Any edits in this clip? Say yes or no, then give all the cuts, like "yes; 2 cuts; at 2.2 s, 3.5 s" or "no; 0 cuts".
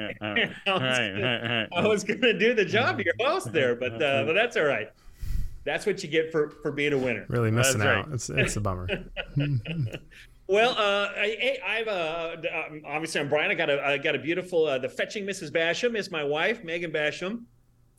no; 0 cuts